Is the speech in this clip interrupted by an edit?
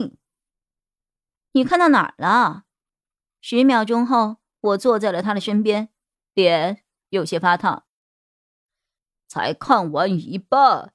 no; 0 cuts

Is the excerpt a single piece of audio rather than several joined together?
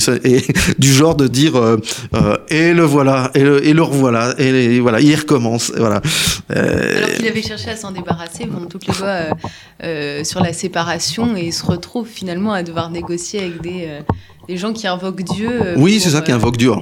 yes; 0 cuts

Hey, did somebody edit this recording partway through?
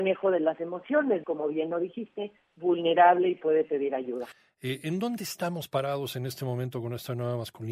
yes; 2 cuts; at 1.2 s, 2.5 s

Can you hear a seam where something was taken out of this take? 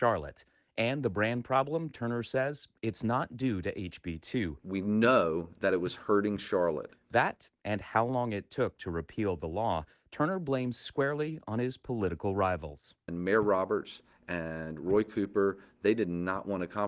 no; 0 cuts

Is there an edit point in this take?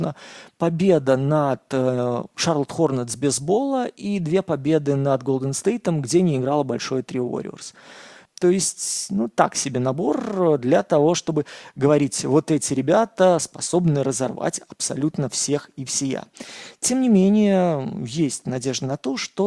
yes; 1 cut; at 8.3 s

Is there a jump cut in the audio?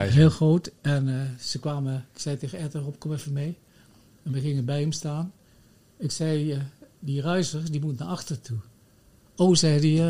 no; 0 cuts

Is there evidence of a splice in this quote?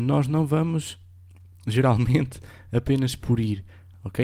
no; 0 cuts

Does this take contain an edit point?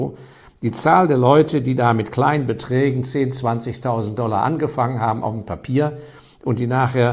no; 0 cuts

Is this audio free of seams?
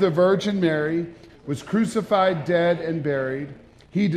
no; 1 cut; at 1.3 s

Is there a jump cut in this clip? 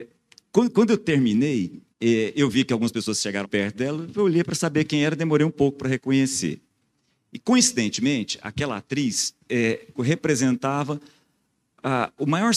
yes; 3 cuts; at 1.9 s, 3.4 s, 9.9 s

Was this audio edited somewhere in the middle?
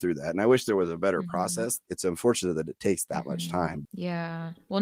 no; 0 cuts

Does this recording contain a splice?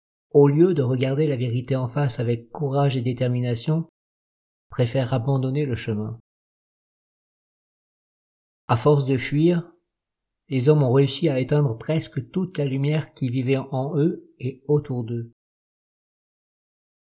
yes; 1 cut; at 4.5 s

